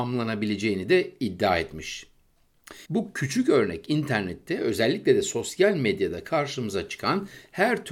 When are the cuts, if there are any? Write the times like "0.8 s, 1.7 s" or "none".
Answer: 2.8 s